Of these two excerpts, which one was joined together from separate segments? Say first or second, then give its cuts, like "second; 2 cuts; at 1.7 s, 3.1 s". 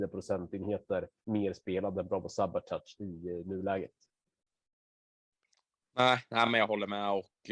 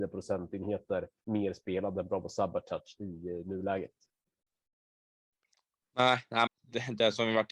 second; 1 cut; at 6.5 s